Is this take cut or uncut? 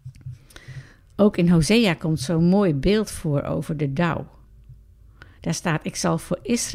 uncut